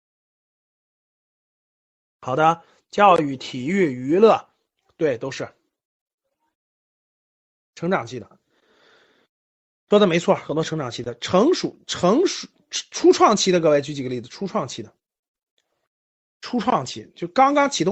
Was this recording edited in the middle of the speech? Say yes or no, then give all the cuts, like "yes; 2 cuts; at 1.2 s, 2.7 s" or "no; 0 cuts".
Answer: no; 0 cuts